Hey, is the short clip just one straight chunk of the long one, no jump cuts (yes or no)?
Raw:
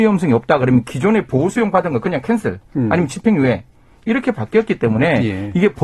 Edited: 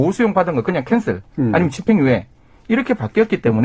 yes